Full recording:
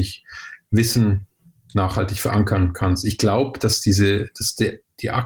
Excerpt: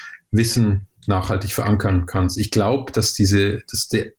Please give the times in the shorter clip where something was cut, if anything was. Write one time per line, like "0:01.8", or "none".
0:01.0

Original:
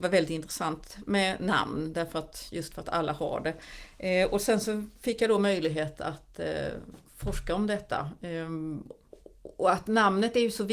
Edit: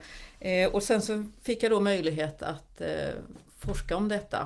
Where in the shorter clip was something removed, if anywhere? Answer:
none

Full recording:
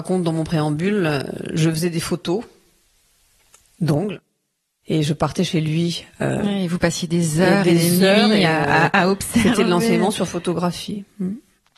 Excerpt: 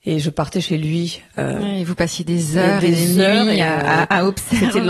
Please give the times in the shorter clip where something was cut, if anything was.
none

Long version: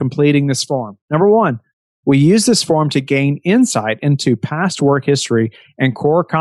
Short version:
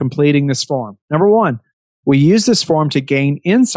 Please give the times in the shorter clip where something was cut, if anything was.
none

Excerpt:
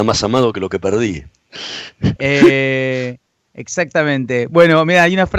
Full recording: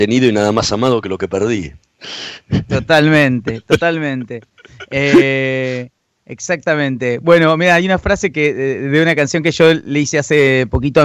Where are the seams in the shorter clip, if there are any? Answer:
0:02.2

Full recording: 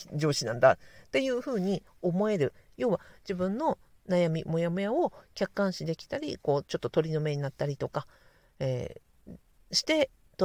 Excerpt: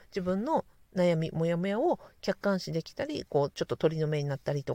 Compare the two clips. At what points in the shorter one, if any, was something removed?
none

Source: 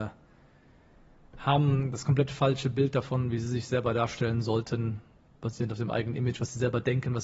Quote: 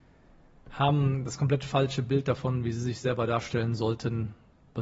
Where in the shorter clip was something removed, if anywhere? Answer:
none

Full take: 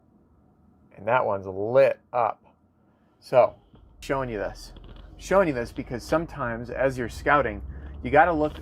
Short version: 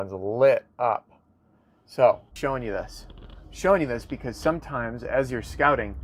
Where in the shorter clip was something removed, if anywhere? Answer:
0:02.3

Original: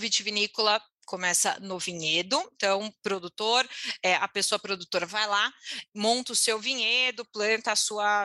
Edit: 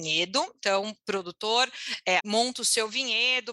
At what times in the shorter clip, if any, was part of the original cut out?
0:02.2

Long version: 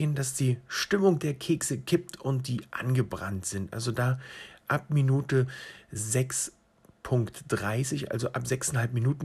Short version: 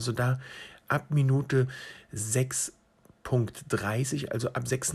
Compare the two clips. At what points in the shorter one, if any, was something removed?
none

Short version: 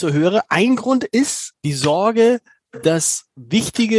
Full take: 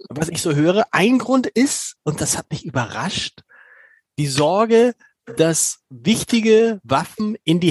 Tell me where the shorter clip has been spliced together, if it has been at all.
0:01.6

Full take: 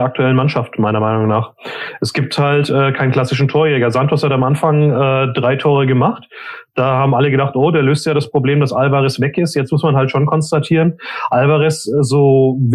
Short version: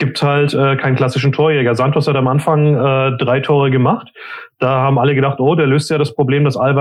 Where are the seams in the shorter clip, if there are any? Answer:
none

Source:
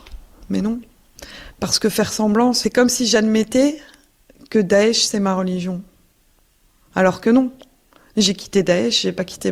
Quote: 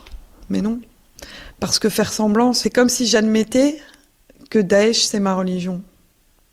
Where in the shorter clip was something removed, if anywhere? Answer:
none

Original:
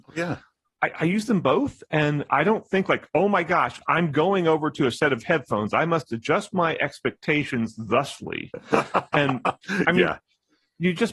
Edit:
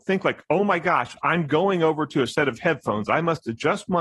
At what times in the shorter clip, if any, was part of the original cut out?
none

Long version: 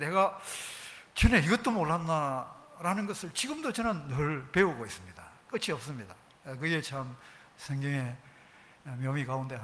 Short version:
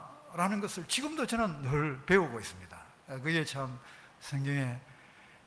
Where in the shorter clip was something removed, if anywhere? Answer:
0:03.0

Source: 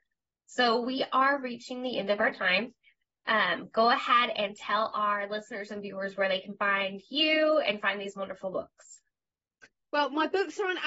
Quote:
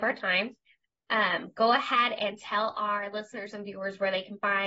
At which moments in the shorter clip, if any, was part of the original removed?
none

